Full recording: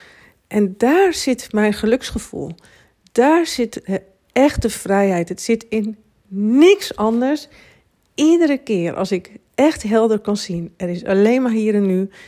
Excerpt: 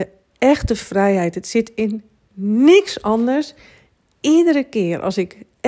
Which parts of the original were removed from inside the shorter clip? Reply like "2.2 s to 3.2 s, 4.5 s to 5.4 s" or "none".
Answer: none